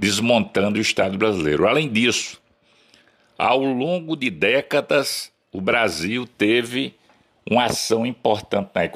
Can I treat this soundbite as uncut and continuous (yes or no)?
yes